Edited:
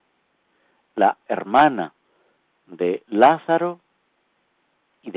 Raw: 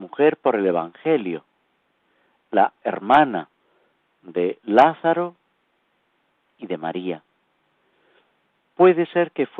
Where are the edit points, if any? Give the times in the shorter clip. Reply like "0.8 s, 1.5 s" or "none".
none